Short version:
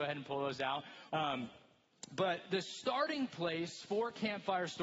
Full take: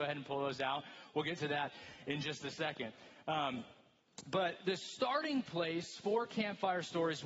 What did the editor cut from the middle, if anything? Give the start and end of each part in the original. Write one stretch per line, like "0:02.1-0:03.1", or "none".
0:01.1-0:03.2